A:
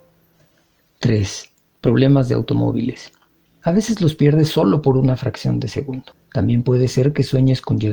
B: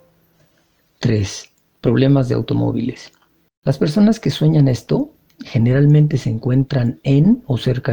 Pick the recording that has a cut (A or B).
A